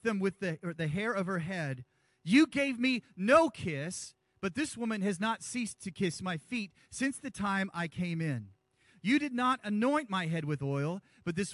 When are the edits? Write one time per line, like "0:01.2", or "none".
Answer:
none